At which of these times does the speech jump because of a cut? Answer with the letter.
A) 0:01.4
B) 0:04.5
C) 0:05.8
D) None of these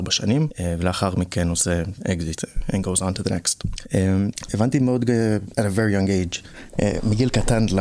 B